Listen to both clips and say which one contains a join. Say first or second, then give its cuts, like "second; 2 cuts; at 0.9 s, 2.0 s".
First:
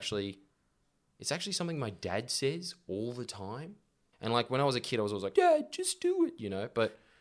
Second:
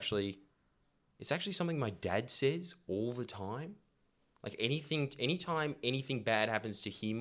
first; 2 cuts; at 4.1 s, 5.3 s